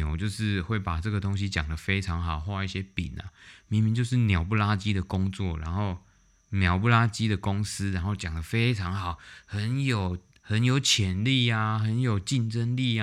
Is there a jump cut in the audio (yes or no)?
no